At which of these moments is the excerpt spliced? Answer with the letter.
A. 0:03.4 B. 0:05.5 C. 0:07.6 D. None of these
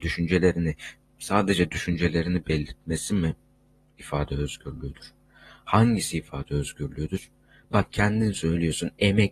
D